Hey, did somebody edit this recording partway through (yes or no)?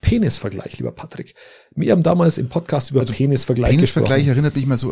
no